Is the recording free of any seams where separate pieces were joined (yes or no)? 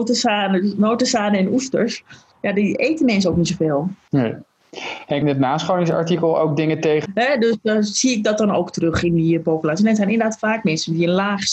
no